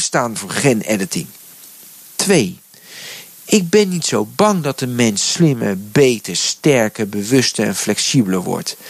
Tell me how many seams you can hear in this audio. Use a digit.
0